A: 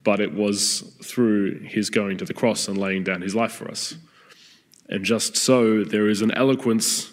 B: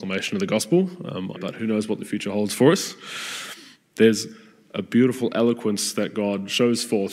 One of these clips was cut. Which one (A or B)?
B